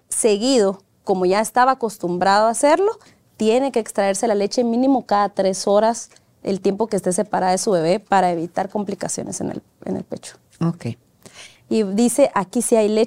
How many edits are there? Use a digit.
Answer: 1